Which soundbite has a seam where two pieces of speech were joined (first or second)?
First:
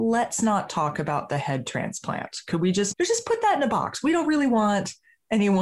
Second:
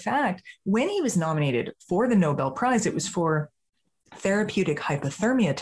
first